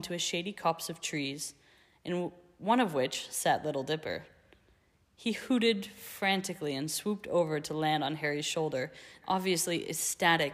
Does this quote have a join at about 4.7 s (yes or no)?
no